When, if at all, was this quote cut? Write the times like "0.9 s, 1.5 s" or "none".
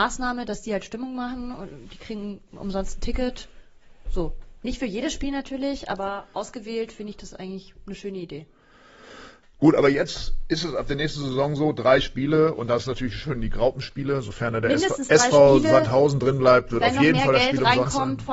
none